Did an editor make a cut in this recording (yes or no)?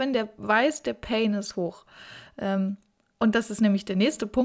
no